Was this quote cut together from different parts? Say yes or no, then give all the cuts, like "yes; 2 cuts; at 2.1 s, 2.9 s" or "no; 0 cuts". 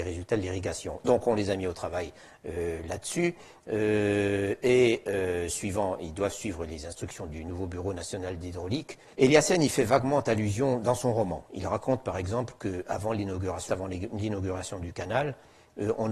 yes; 2 cuts; at 9.1 s, 13.7 s